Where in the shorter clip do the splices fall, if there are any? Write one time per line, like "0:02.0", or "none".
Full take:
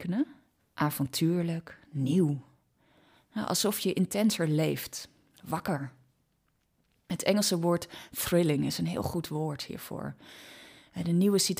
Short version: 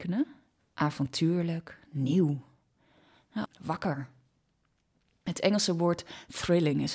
0:03.4